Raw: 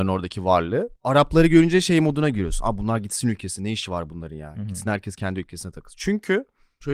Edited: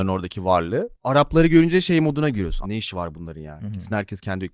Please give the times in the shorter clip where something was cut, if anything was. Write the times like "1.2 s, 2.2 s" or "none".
2.6 s